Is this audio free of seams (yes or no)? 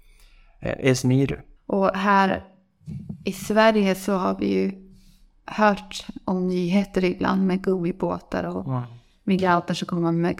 no